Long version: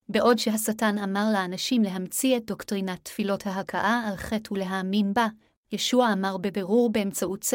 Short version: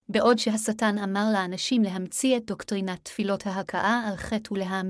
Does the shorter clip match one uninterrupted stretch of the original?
yes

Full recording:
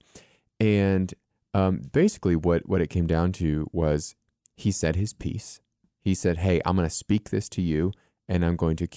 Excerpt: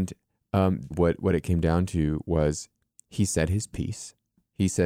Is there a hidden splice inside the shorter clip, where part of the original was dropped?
yes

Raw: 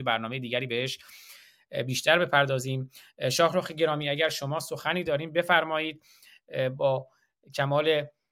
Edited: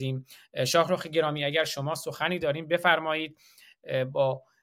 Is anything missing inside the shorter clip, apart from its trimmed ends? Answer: no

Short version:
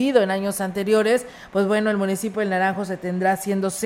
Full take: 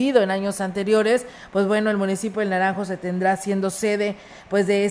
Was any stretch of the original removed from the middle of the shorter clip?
no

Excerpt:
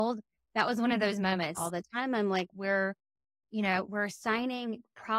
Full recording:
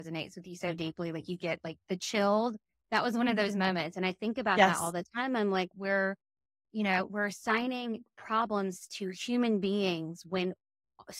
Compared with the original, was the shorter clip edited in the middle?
yes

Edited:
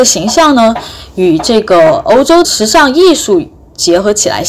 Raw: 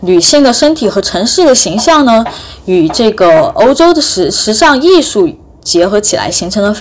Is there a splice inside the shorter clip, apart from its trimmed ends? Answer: yes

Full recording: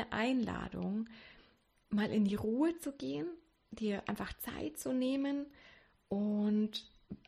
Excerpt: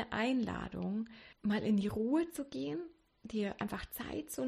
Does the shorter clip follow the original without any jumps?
no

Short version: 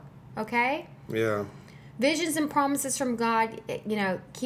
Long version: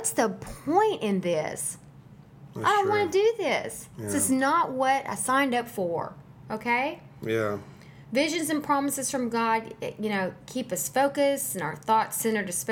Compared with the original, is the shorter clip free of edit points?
yes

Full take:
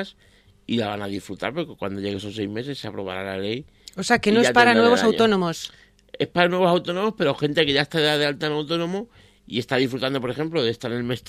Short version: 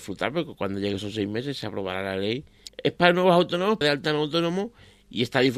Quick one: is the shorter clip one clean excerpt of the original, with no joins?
no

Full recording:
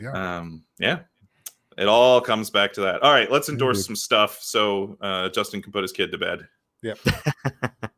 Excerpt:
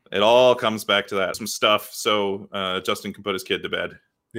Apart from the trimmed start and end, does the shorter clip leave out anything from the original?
yes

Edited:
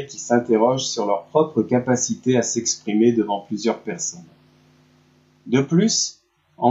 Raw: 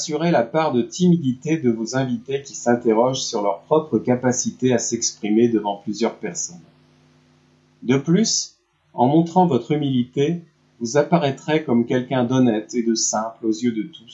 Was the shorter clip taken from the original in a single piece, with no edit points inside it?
yes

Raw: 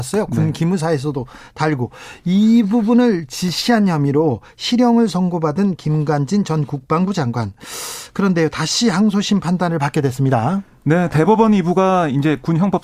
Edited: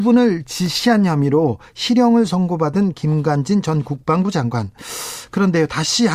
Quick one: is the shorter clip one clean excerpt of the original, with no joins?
yes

